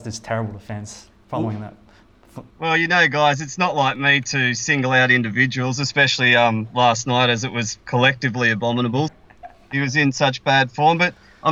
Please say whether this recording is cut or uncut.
cut